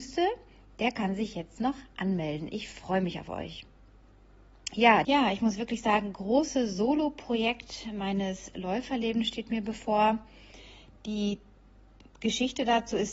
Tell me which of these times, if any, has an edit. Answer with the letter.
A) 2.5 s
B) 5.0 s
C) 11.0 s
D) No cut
B